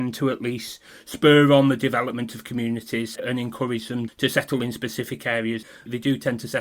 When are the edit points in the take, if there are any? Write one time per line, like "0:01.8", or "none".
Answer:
none